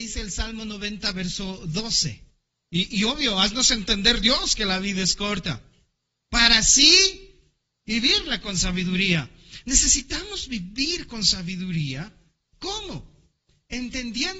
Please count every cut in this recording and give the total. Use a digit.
1